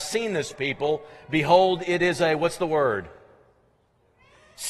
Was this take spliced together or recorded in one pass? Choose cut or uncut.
uncut